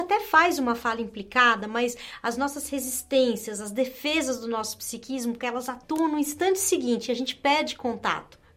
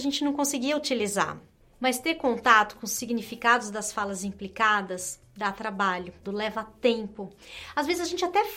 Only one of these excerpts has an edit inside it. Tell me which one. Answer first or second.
second